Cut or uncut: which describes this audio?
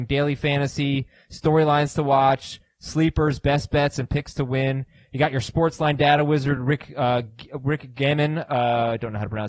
uncut